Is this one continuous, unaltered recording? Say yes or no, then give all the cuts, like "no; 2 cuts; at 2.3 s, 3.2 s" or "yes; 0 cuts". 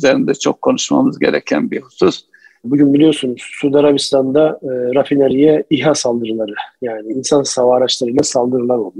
no; 1 cut; at 2.6 s